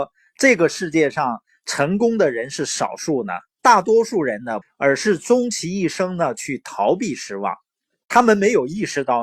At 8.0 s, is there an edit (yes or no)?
no